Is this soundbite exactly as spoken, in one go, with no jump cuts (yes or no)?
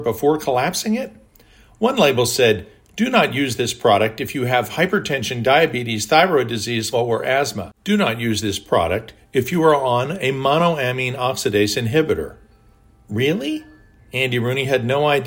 no